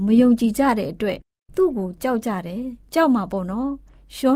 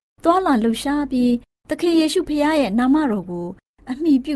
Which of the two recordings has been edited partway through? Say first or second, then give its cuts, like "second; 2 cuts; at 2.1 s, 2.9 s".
first; 1 cut; at 2.8 s